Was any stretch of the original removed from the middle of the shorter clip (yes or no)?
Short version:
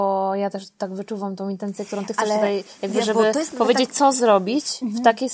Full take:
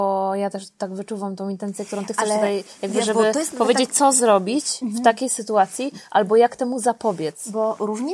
no